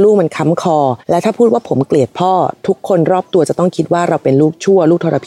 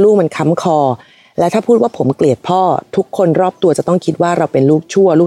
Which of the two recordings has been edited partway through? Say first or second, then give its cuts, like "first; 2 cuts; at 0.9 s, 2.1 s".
first; 1 cut; at 1.0 s